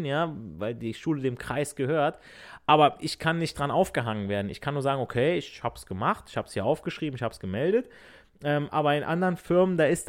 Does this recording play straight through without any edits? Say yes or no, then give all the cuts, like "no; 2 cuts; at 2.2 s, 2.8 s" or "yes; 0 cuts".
yes; 0 cuts